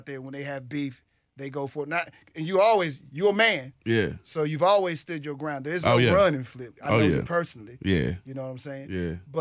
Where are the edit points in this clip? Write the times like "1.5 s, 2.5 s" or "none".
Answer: none